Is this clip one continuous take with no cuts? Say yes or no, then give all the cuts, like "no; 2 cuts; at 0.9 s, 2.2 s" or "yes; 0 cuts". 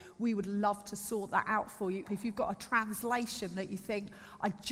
no; 1 cut; at 2.0 s